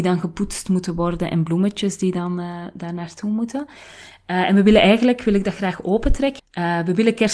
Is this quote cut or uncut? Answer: cut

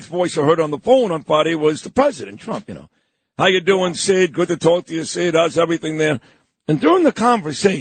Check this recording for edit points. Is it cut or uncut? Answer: uncut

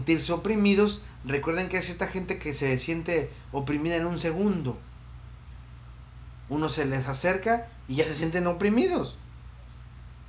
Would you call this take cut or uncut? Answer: uncut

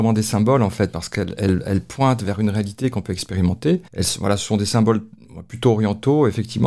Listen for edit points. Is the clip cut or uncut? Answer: cut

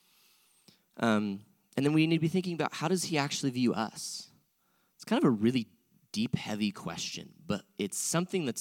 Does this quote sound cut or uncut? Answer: uncut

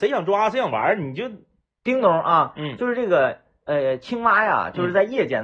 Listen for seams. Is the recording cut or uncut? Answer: uncut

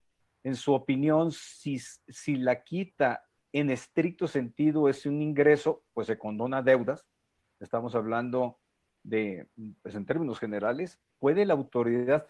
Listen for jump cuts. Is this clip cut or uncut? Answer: uncut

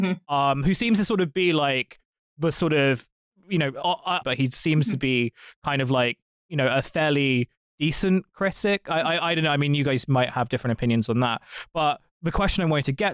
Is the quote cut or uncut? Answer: cut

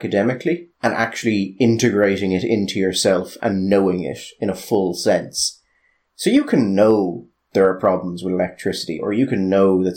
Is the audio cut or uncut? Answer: uncut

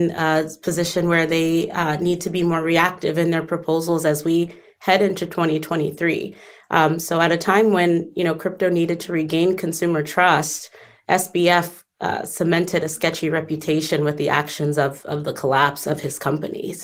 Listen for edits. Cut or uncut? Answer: uncut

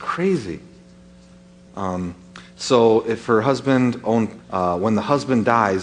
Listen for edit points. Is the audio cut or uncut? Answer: cut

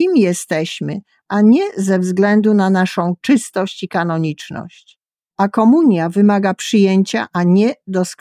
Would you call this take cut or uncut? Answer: cut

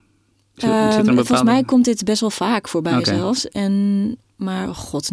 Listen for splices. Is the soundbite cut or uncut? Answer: uncut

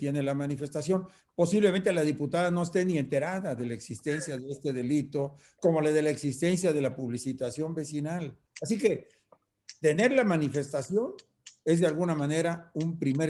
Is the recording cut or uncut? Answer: cut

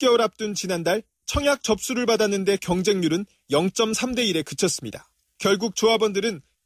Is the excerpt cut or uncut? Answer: uncut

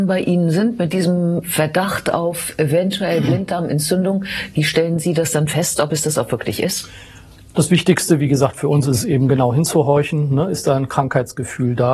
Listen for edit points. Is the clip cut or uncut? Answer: uncut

